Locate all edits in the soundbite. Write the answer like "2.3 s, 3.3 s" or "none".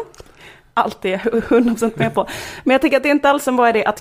none